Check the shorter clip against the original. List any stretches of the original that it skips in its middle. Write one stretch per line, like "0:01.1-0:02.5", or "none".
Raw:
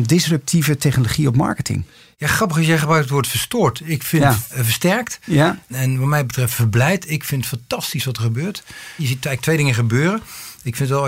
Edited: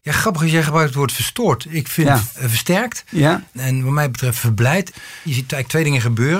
0:07.0-0:08.6